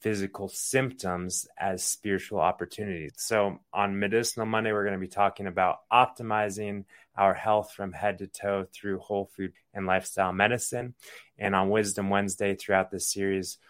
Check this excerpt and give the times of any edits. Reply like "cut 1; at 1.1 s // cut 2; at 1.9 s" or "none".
cut 1; at 3.1 s // cut 2; at 9.5 s